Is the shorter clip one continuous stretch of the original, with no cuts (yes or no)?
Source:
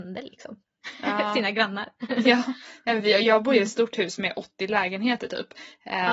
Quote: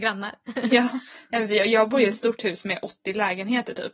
yes